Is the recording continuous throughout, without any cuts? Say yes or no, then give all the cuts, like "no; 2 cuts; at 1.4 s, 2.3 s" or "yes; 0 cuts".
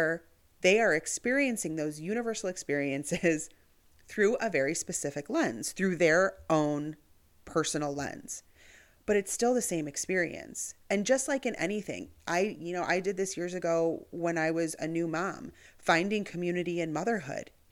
yes; 0 cuts